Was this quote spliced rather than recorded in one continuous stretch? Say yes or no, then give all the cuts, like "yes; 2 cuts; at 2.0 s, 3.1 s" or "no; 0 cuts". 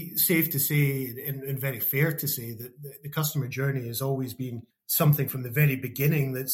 no; 0 cuts